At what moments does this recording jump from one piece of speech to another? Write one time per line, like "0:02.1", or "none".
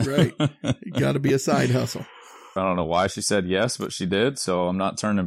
0:02.6